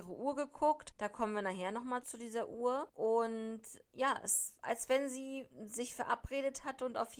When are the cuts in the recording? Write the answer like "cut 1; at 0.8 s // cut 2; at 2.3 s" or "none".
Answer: cut 1; at 2.0 s